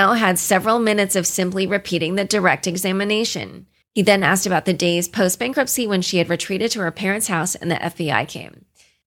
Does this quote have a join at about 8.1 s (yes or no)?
no